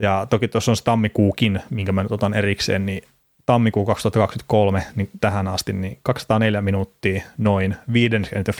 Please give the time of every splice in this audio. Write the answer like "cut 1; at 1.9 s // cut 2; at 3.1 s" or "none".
cut 1; at 5.2 s